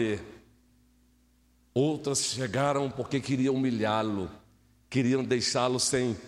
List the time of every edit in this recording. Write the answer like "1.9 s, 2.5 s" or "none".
2.9 s